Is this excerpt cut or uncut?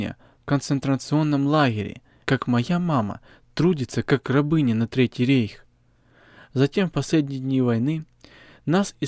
cut